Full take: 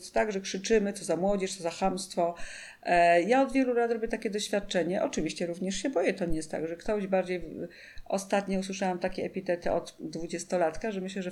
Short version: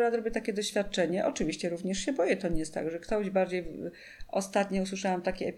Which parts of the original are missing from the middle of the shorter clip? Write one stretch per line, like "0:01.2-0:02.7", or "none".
none